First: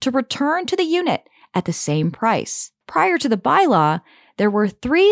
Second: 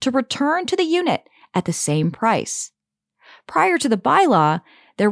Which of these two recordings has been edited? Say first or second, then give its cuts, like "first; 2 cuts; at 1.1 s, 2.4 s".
first; 1 cut; at 2.8 s